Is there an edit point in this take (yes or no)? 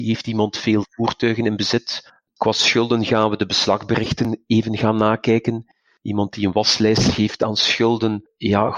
no